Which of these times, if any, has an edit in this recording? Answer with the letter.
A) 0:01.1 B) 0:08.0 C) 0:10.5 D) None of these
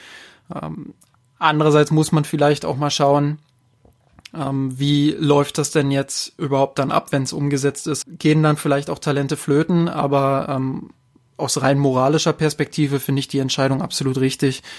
B